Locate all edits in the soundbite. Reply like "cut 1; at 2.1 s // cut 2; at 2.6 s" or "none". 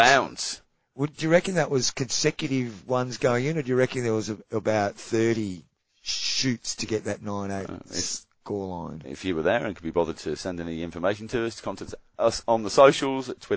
none